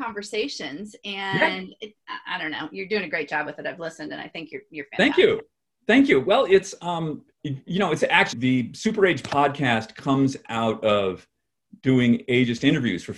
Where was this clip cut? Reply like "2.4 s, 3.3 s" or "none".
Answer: 7.3 s, 8.3 s